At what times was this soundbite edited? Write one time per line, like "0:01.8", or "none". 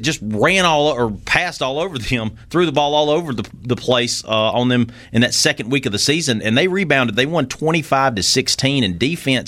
none